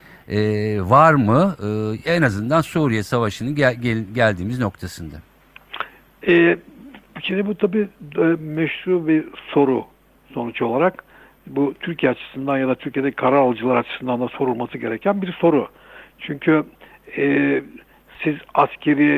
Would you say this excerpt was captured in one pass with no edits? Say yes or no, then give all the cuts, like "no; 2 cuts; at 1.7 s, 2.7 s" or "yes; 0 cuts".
yes; 0 cuts